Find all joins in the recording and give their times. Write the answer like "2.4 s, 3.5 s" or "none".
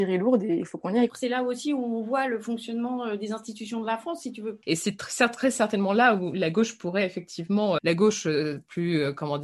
1.1 s, 4.6 s, 7.8 s